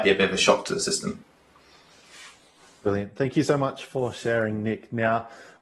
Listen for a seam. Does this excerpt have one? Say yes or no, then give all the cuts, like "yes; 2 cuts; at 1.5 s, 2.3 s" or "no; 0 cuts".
no; 0 cuts